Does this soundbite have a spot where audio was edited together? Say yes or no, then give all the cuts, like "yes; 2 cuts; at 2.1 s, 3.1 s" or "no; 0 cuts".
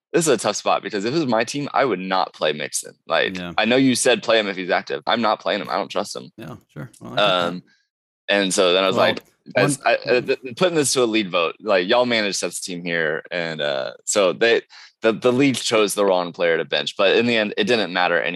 yes; 1 cut; at 5.1 s